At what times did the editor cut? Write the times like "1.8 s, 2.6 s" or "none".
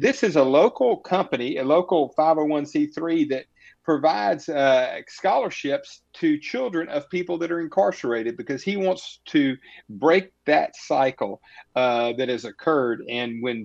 6.1 s